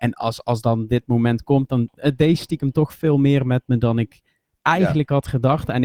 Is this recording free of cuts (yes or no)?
yes